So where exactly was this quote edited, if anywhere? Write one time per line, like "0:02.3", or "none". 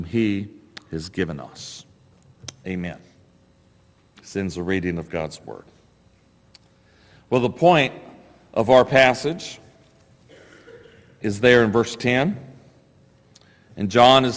none